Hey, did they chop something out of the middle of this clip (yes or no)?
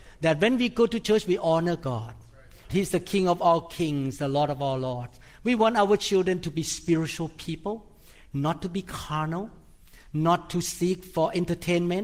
yes